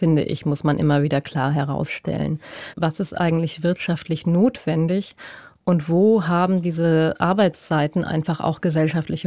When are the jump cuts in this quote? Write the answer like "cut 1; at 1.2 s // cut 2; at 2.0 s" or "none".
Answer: cut 1; at 2.7 s